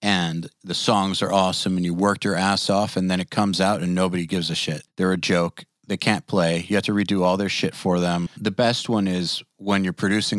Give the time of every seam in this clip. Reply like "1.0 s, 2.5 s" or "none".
4.9 s, 8.3 s